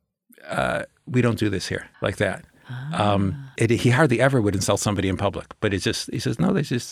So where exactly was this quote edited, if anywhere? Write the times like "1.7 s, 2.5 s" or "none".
1.9 s, 3.6 s